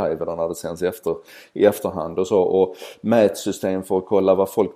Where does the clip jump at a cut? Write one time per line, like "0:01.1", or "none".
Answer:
none

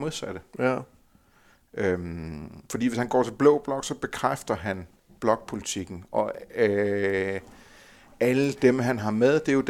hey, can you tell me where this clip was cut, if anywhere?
0:02.7

